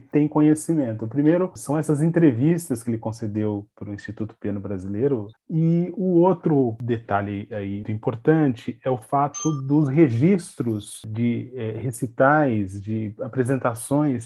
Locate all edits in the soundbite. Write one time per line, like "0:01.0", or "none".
0:05.3
0:07.8